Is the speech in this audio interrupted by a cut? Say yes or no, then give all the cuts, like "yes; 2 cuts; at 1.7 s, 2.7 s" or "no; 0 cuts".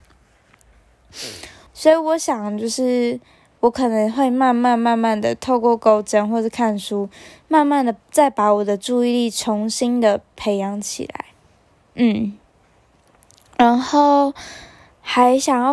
yes; 1 cut; at 1.7 s